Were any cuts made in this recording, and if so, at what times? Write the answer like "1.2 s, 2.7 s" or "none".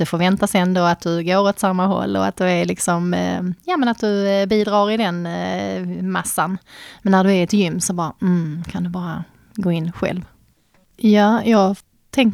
10.8 s